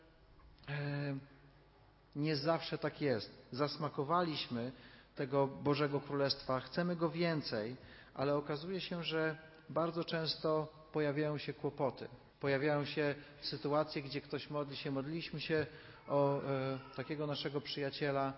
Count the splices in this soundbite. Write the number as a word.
one